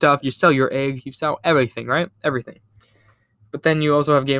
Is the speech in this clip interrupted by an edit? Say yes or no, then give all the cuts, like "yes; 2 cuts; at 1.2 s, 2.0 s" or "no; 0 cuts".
yes; 1 cut; at 1.0 s